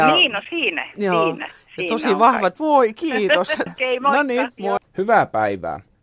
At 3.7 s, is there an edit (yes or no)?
yes